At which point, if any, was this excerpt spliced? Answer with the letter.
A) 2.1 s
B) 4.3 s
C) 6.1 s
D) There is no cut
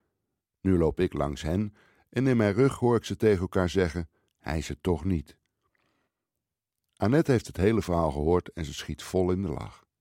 B